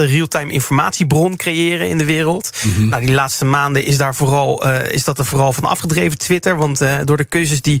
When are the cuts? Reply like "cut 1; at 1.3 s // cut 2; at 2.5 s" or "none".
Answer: none